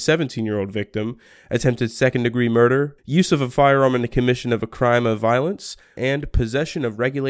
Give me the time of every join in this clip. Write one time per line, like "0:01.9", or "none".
0:03.0
0:06.0